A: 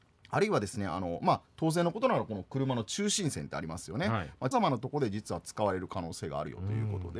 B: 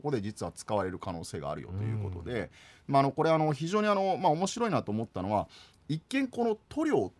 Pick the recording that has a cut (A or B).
A